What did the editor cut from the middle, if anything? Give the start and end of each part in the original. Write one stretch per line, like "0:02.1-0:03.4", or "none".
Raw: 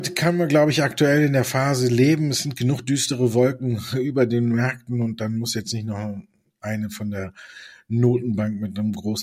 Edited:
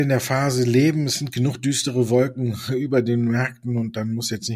none